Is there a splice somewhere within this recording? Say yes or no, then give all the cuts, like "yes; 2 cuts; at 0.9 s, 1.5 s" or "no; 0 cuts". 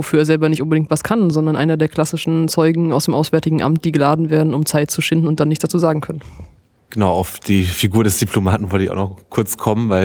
no; 0 cuts